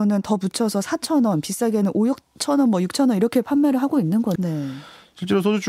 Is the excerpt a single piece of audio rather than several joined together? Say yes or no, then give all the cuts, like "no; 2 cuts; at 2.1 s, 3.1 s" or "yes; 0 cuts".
no; 1 cut; at 4.4 s